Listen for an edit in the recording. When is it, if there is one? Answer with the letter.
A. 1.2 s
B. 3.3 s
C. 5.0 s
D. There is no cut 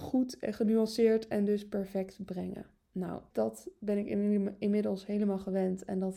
B